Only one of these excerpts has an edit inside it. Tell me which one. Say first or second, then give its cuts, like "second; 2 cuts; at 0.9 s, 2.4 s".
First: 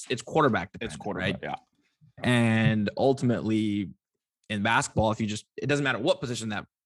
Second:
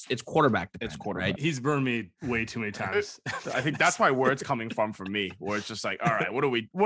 second; 1 cut; at 1.4 s